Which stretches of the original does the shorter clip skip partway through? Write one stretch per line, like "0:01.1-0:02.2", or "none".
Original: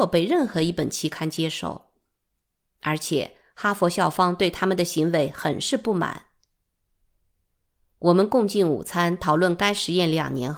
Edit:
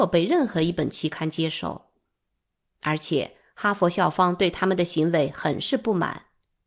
none

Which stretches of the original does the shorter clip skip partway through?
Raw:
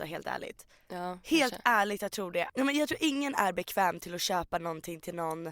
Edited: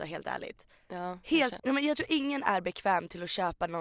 0:01.6-0:02.5

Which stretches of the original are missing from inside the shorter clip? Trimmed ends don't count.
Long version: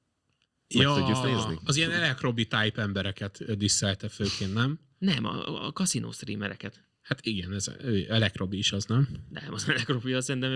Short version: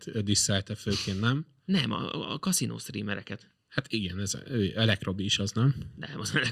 none

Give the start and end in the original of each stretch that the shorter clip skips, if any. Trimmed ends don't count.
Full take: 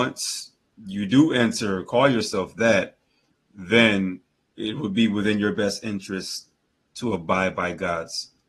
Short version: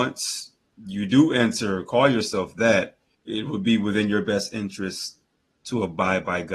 0:03.1-0:04.4

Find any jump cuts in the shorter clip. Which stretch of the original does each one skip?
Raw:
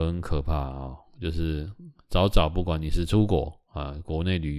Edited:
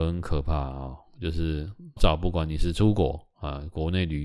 0:02.0-0:02.3

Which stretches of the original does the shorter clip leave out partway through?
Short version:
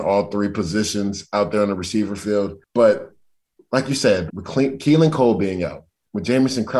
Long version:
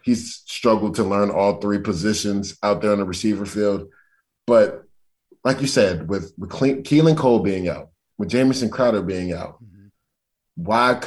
0:03.9-0:04.4
0:06.0-0:06.4

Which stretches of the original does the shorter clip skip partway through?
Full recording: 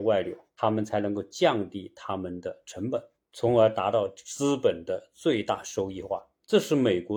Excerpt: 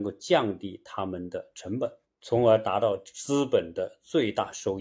none

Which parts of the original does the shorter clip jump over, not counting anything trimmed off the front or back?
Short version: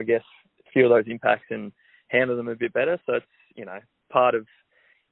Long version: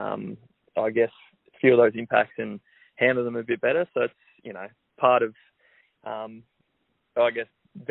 none

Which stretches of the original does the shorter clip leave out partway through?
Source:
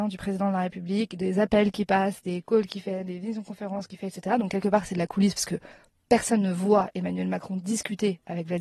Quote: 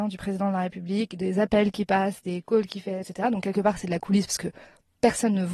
0:03.0-0:04.1

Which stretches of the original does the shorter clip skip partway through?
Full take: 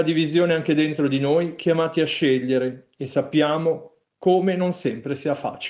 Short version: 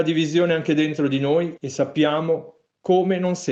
0:01.6-0:02.9

